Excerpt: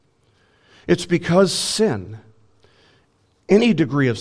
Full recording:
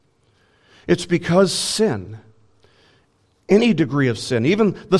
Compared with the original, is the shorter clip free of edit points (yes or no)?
yes